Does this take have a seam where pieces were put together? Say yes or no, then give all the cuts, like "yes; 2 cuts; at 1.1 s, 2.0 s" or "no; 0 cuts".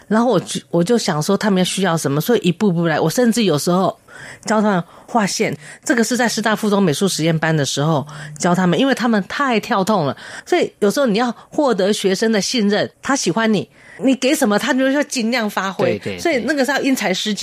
yes; 1 cut; at 12.9 s